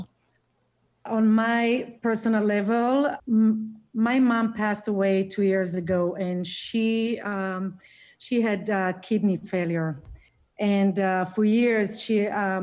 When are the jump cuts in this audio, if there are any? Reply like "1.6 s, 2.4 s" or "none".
1.1 s, 3.2 s

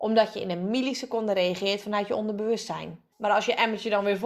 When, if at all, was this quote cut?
3.1 s

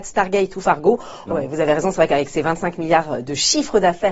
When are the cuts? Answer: 1.3 s

